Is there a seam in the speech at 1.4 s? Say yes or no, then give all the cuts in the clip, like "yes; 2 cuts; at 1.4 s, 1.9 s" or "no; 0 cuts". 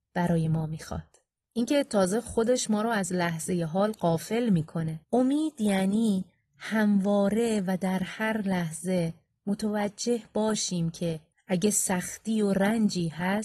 yes; 2 cuts; at 1.4 s, 5.0 s